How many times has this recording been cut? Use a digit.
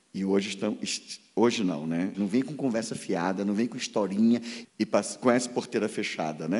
2